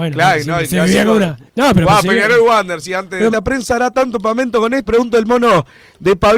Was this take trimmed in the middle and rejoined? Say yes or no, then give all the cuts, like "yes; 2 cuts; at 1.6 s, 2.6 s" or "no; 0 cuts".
yes; 3 cuts; at 1.5 s, 3.3 s, 4.9 s